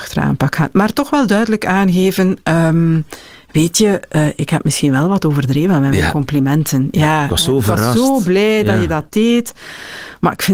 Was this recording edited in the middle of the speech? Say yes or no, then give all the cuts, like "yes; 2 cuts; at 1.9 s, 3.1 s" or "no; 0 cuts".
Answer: no; 0 cuts